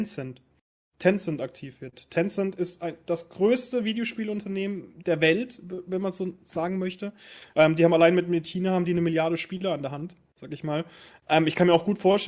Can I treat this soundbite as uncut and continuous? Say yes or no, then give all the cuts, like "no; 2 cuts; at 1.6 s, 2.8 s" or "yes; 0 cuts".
yes; 0 cuts